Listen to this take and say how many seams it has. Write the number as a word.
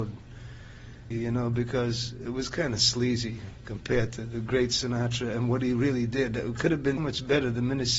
two